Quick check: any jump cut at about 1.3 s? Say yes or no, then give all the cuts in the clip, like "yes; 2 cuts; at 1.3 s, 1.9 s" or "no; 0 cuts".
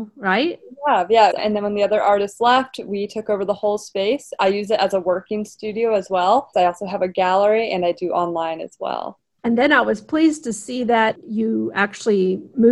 yes; 2 cuts; at 1.3 s, 6.5 s